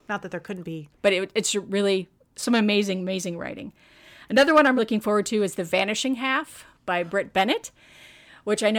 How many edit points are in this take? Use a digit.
2